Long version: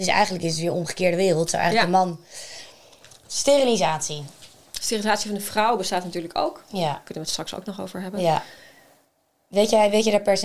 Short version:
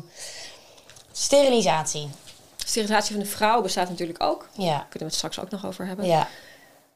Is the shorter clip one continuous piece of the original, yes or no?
yes